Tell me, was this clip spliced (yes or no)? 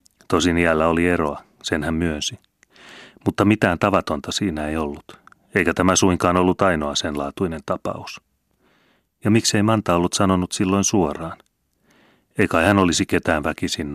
no